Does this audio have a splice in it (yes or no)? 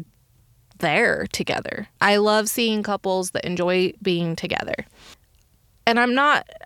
yes